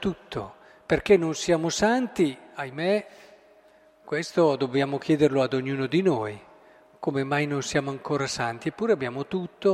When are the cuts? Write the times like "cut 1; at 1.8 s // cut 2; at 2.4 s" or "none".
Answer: none